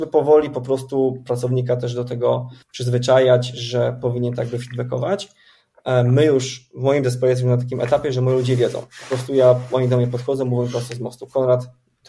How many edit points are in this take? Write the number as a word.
one